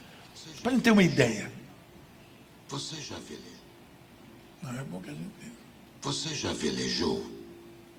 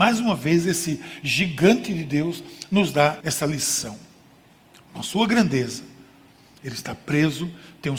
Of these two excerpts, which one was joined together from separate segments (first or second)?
second